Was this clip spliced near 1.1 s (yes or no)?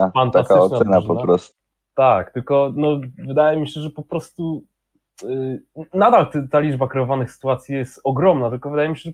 no